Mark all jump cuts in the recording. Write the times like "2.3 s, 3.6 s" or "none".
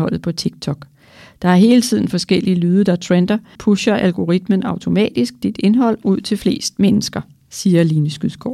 3.5 s

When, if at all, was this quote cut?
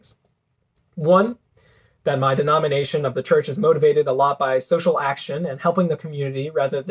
none

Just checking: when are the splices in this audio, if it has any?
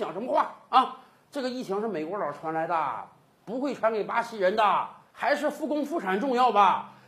none

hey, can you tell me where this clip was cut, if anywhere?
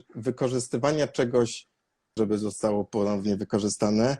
2.2 s

